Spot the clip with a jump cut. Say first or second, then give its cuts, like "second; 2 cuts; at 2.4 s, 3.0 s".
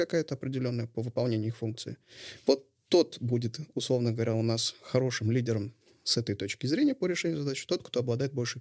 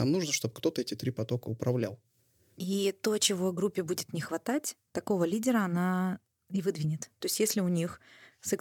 second; 2 cuts; at 2.6 s, 7.2 s